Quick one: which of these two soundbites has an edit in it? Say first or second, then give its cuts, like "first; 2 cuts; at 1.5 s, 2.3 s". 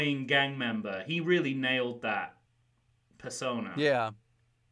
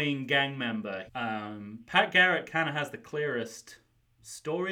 second; 1 cut; at 1.1 s